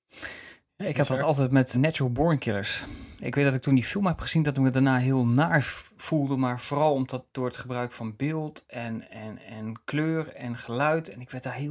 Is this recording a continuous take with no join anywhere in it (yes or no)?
no